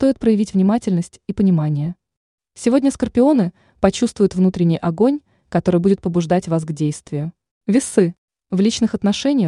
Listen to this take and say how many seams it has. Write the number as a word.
two